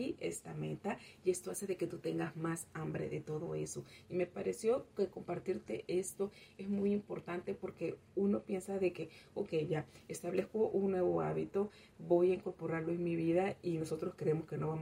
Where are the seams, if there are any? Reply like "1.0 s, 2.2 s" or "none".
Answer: 4.0 s